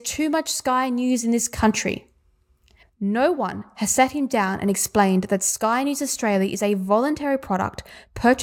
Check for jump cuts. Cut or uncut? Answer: cut